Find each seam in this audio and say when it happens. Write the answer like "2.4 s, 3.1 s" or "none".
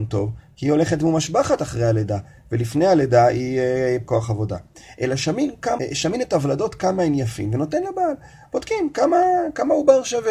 4.0 s, 5.8 s